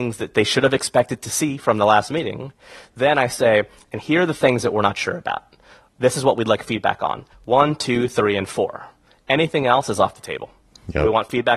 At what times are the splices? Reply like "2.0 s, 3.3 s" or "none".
none